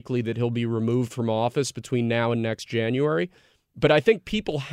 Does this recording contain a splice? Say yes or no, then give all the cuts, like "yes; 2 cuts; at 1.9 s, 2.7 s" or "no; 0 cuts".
no; 0 cuts